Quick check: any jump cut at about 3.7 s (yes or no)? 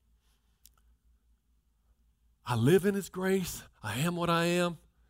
no